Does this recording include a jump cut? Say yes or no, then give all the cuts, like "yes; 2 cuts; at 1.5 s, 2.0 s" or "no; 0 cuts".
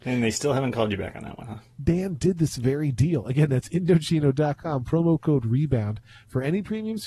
yes; 1 cut; at 1.7 s